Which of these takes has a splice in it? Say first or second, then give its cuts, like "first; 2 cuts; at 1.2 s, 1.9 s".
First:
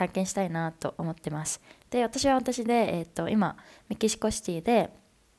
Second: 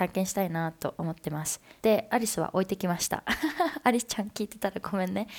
second; 1 cut; at 1.8 s